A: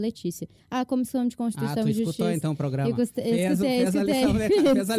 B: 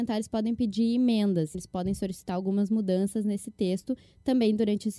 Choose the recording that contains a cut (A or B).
B